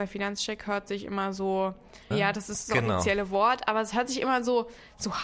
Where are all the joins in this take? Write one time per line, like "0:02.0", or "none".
0:02.1